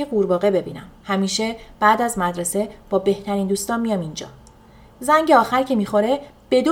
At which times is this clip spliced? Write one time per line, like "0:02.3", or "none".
0:01.0